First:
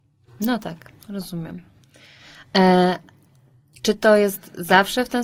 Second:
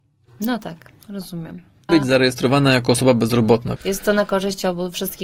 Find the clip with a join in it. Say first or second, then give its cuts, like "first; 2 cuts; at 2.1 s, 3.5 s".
second; 2 cuts; at 1.9 s, 3.8 s